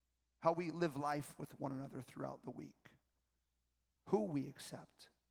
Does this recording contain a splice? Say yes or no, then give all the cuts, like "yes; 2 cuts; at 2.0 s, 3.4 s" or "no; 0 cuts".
yes; 1 cut; at 3.9 s